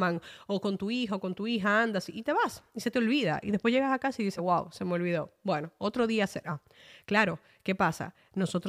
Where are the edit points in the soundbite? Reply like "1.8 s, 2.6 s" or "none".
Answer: none